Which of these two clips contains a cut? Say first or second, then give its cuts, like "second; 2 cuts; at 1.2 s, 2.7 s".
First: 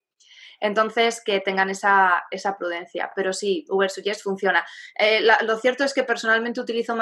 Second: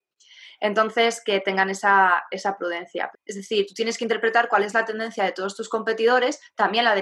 second; 1 cut; at 3.1 s